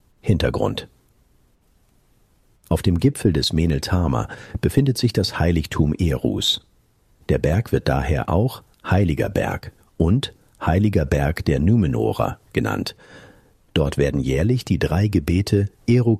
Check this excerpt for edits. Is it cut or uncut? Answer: uncut